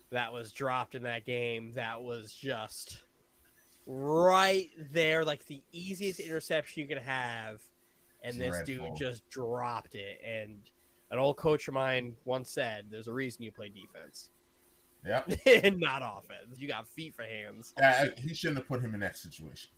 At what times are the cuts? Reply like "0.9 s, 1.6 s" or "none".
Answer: 16.6 s, 17.8 s